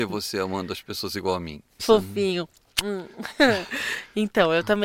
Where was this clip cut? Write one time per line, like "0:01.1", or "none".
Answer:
0:01.8